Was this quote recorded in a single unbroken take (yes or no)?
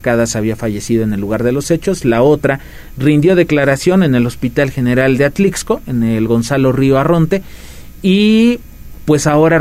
yes